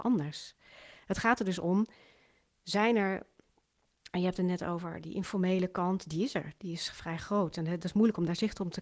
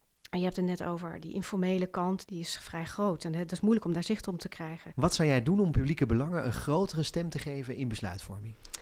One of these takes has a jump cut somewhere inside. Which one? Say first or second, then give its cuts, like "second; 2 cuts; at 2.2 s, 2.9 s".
second; 2 cuts; at 2.2 s, 4.9 s